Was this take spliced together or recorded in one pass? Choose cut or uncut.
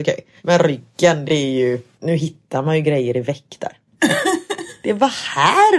uncut